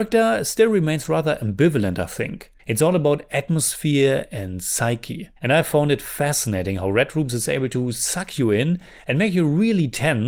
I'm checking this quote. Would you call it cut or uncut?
cut